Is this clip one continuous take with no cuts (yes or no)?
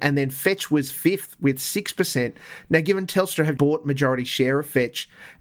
no